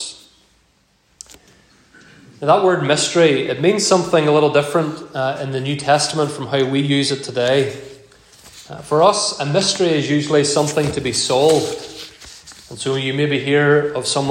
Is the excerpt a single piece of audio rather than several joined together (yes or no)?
yes